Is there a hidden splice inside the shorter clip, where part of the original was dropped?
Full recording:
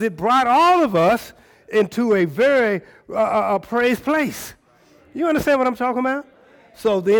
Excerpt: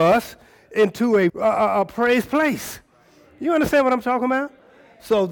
yes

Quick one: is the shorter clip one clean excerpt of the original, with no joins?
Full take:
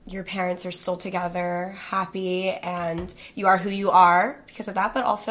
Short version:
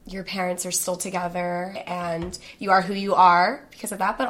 no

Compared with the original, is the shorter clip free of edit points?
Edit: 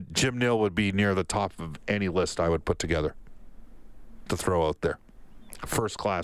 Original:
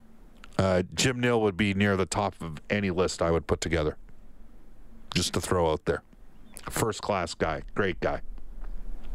no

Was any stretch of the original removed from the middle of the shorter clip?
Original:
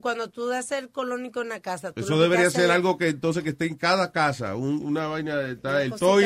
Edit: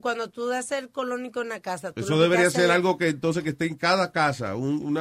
no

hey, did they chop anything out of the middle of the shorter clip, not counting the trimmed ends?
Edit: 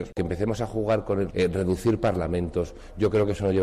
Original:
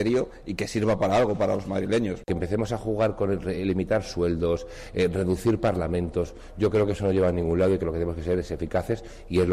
yes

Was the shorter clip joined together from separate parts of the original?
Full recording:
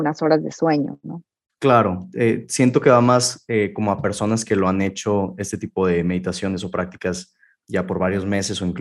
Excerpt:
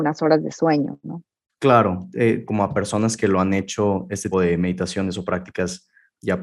yes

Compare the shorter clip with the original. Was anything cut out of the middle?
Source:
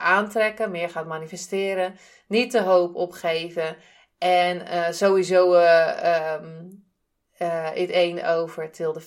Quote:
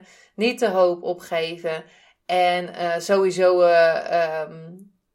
no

